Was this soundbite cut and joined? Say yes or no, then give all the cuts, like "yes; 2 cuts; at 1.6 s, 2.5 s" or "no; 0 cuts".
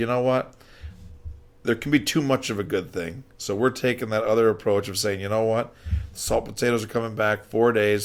no; 0 cuts